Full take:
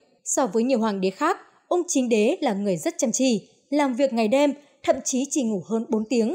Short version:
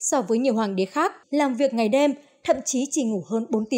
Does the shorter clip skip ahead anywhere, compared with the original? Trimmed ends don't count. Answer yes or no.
yes